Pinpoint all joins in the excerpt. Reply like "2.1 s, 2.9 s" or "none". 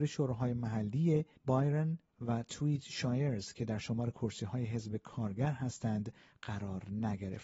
2.1 s